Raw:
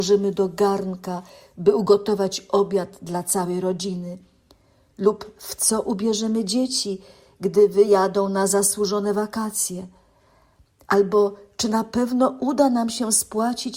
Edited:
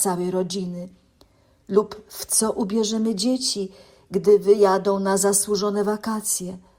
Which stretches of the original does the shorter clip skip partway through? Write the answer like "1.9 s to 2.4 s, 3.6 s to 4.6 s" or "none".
none

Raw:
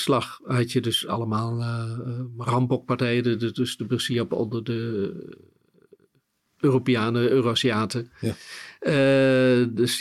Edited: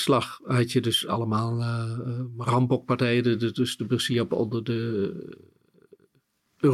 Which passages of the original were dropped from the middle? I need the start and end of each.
none

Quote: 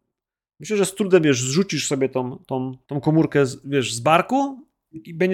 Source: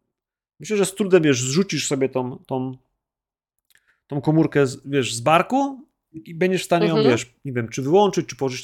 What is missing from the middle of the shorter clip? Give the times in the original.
2.8 s to 4.0 s

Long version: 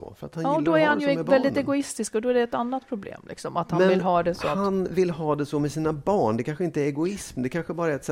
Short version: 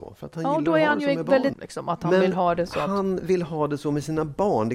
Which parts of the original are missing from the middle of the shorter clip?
1.5 s to 3.2 s

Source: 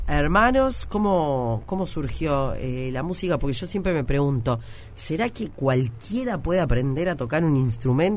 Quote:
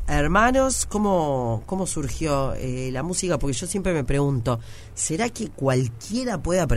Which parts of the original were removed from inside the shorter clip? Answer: none

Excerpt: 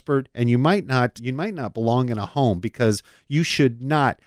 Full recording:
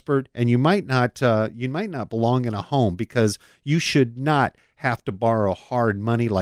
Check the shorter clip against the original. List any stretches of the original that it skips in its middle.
1.2 s to 1.5 s

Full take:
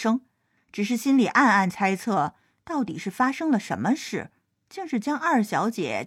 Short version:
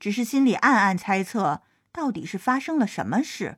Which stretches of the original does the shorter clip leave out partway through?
none

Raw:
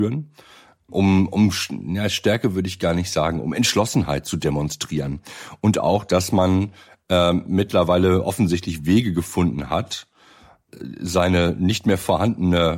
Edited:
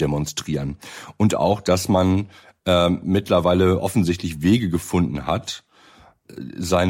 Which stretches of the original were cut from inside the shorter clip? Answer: none

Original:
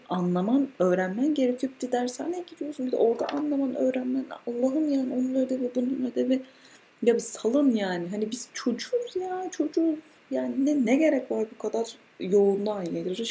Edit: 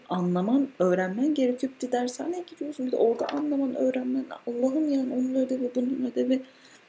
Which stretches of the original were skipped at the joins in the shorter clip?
none

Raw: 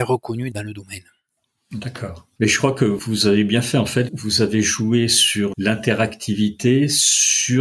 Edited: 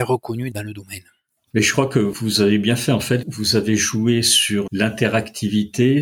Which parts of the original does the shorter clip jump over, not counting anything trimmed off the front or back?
1.5 s to 2.3 s

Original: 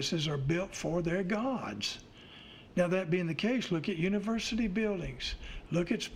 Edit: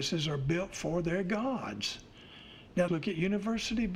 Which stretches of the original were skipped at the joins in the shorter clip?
2.9 s to 3.7 s

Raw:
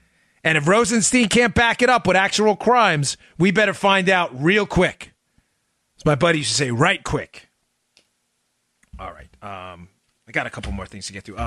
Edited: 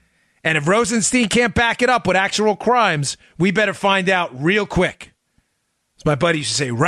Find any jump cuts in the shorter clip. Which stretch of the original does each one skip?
none

